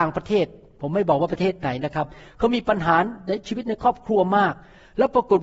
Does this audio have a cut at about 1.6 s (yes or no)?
no